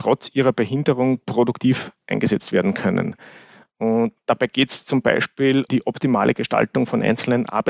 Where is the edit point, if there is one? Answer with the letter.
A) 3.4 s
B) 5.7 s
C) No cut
B